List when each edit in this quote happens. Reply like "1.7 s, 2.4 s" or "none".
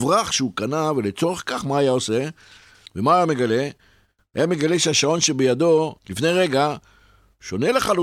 2.9 s, 6.0 s